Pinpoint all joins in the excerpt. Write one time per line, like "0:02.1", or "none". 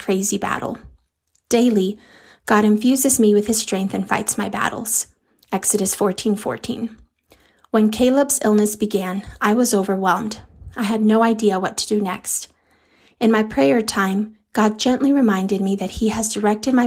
none